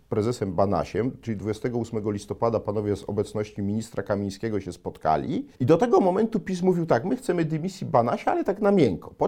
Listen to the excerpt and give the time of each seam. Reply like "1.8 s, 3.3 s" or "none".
5.5 s